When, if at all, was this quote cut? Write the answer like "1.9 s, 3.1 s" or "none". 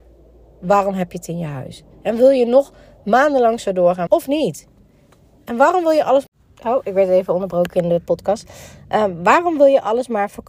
4.1 s

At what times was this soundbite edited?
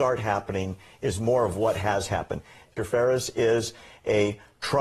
2.8 s

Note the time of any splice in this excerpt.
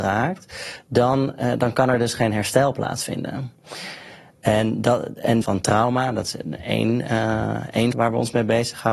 5.4 s, 7.9 s

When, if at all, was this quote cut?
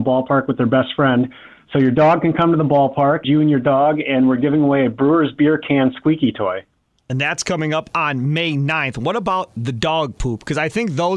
3.2 s

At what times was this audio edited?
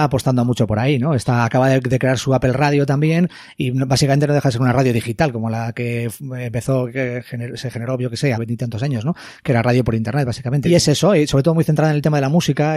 8.3 s, 10.6 s

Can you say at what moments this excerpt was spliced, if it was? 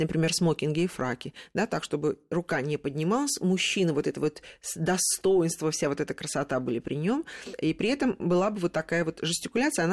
none

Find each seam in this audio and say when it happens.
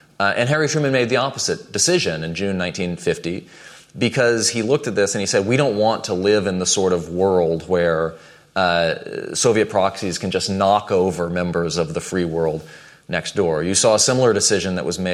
none

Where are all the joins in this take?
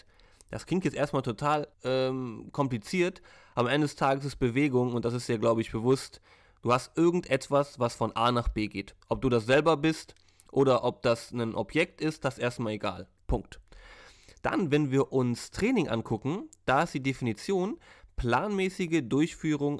1.7 s, 13.2 s

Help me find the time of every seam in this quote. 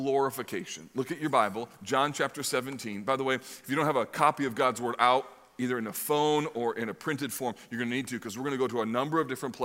none

